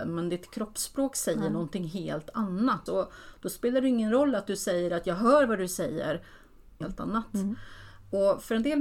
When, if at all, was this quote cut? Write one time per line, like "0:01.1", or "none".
0:02.9
0:06.8